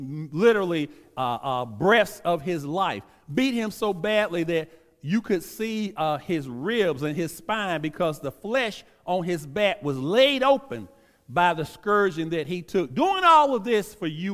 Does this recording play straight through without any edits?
yes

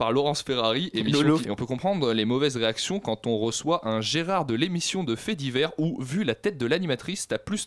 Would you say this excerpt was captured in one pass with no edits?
no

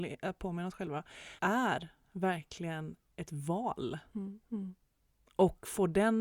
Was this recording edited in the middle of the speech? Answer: yes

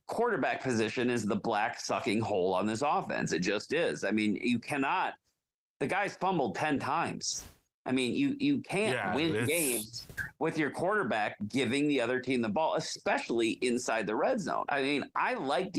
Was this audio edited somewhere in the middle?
yes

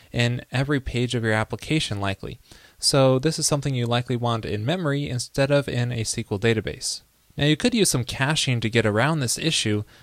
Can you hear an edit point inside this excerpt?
no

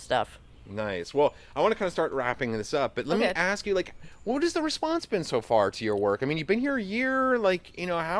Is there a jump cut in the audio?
no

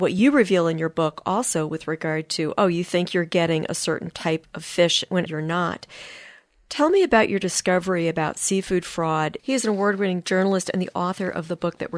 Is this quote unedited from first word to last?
no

